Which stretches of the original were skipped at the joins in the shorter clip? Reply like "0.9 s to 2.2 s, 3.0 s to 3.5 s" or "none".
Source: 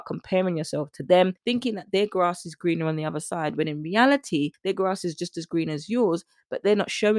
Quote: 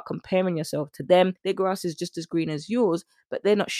1.4 s to 4.6 s